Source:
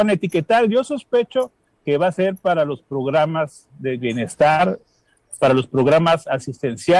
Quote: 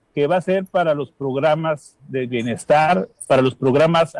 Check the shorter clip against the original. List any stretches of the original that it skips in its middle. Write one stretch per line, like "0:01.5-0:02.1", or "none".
0:04.9-0:05.3